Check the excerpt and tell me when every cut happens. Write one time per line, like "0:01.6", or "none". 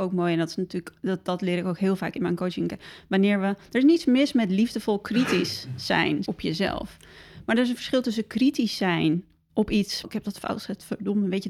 0:06.2
0:10.0